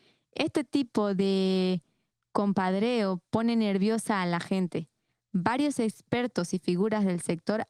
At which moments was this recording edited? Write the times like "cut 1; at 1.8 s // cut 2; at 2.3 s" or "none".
none